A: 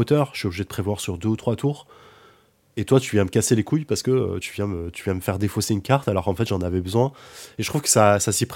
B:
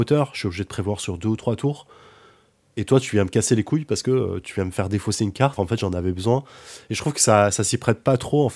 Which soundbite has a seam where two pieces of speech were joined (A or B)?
B